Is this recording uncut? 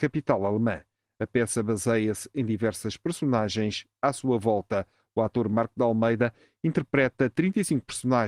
yes; 0 cuts

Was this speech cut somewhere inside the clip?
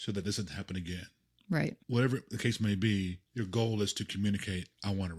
yes; 2 cuts; at 1.8 s, 3.3 s

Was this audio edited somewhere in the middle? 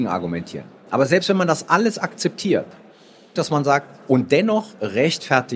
yes; 1 cut; at 3.4 s

